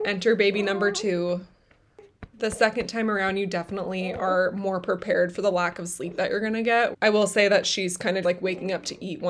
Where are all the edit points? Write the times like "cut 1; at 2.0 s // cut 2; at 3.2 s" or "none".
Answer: cut 1; at 6.9 s // cut 2; at 8.2 s